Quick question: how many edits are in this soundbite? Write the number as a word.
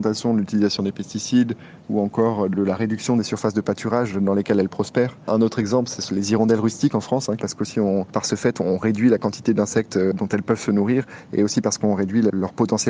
two